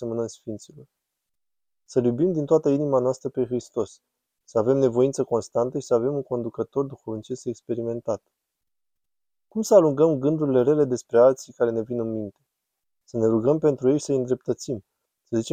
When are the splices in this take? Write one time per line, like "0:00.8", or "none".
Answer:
none

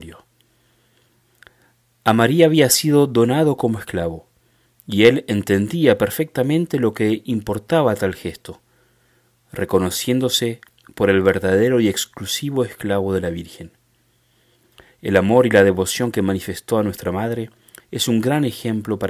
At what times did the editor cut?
0:17.8

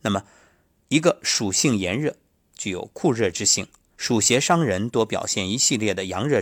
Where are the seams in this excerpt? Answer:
0:02.4
0:03.9

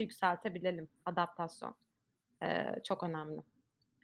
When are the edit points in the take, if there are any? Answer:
none

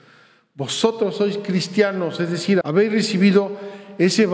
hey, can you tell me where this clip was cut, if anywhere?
0:02.6

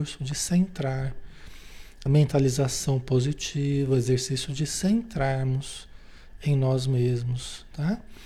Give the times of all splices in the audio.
0:02.1

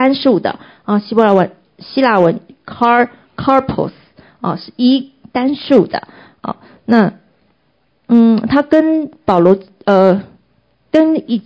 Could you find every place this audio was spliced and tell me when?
none

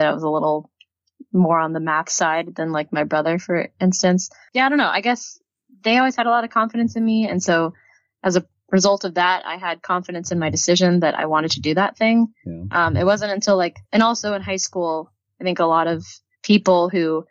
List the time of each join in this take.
0:13.9

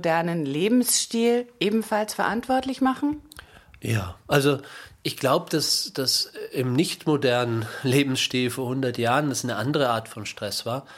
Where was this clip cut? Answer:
none

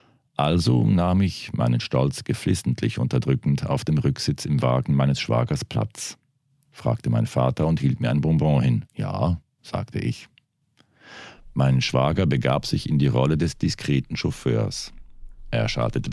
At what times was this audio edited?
0:06.6
0:08.9

